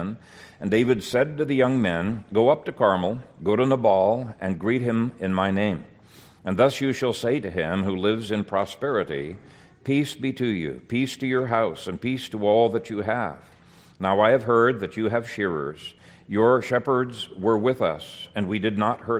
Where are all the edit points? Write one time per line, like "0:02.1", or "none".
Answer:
none